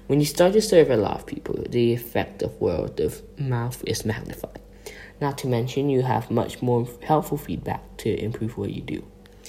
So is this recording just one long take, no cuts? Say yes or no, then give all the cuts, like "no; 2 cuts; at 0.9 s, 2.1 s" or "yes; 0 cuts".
yes; 0 cuts